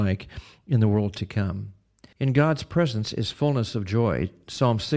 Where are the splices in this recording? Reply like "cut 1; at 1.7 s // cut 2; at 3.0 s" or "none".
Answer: cut 1; at 2.1 s